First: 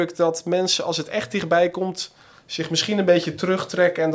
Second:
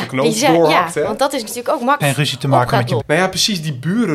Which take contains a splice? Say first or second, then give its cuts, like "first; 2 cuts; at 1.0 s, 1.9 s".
second; 2 cuts; at 2.0 s, 3.0 s